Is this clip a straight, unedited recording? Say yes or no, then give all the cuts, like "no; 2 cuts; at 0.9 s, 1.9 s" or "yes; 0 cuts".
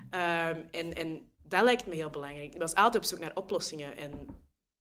yes; 0 cuts